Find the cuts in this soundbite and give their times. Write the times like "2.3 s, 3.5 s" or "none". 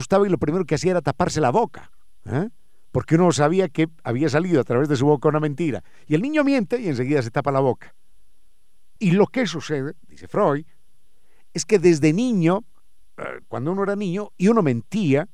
9.0 s, 13.4 s